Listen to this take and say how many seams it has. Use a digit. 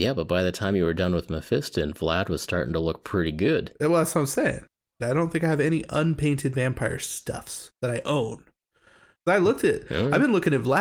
2